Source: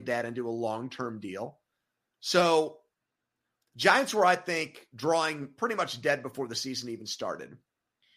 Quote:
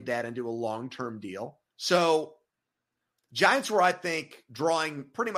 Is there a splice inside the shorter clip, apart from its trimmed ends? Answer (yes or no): yes